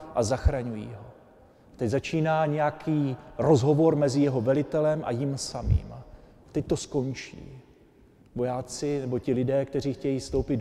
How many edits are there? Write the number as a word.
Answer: one